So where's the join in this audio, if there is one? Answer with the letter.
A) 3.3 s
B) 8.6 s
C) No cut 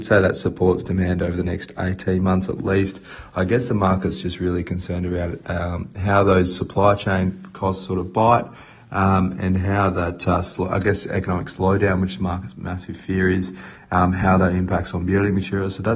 C